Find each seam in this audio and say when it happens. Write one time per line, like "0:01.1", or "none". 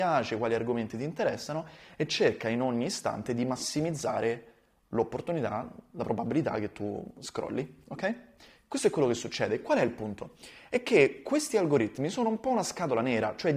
none